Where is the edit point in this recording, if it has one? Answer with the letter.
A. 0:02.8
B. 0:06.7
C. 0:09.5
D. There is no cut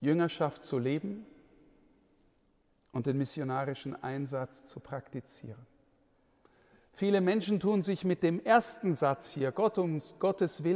D